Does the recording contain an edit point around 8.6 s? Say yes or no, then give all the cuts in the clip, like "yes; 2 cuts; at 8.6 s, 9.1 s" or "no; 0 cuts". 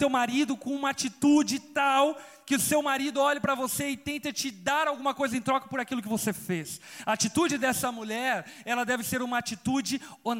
no; 0 cuts